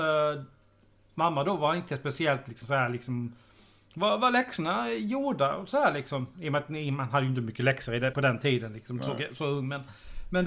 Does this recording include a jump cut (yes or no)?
yes